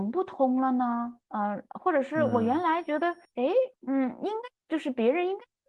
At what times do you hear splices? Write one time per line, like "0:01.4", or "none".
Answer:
0:03.7

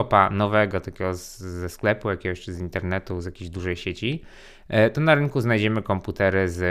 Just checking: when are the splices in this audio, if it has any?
none

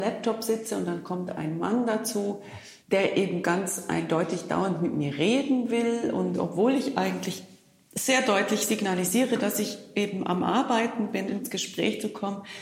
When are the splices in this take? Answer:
0:02.8
0:11.3

